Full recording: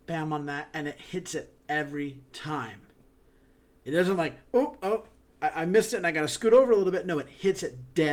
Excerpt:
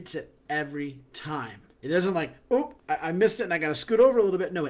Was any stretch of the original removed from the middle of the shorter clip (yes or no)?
yes